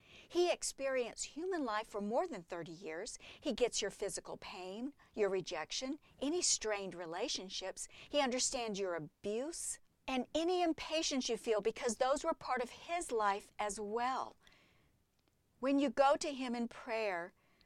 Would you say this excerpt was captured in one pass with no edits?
no; 2 cuts; at 3.4 s, 10.0 s

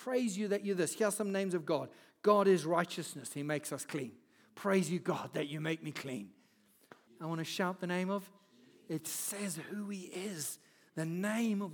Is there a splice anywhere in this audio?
yes; 1 cut; at 7.1 s

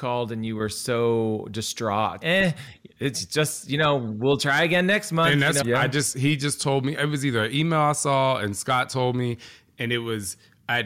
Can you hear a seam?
yes; 2 cuts; at 2.2 s, 5.6 s

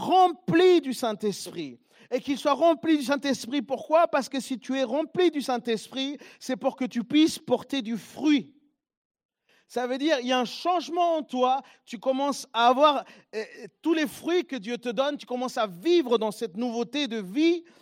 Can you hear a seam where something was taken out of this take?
yes; 1 cut; at 15.2 s

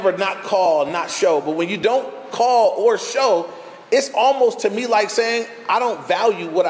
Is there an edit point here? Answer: no; 0 cuts

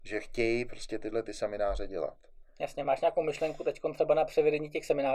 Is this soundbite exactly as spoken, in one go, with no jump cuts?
yes; 0 cuts

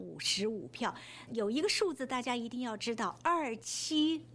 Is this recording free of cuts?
no; 1 cut; at 1.3 s

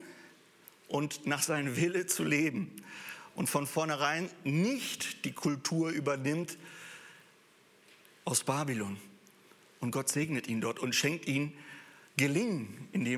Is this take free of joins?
yes; 0 cuts

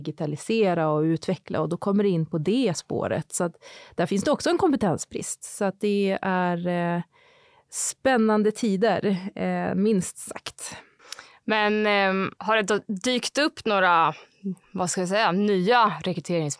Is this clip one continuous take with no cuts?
yes; 0 cuts

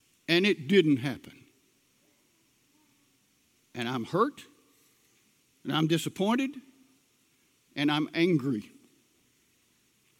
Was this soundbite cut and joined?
no; 0 cuts

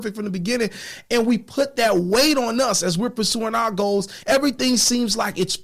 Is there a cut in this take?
yes; 1 cut; at 4.2 s

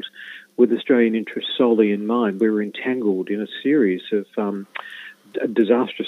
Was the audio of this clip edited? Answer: no; 0 cuts

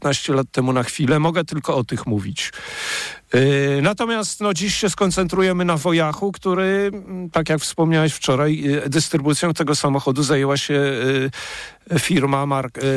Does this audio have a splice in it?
no; 0 cuts

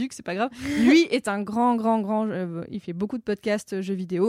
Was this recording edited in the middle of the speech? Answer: no; 0 cuts

